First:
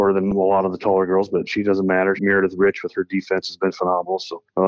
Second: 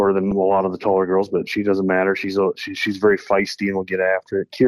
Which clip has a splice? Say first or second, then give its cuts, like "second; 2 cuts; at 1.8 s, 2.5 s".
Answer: first; 1 cut; at 2.2 s